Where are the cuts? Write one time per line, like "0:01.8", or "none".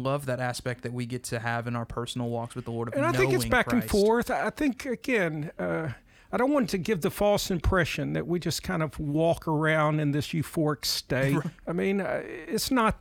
0:11.4